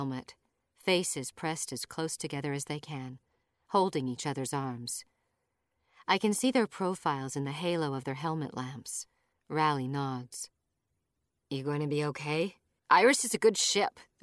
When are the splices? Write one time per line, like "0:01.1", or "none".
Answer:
0:09.3
0:12.8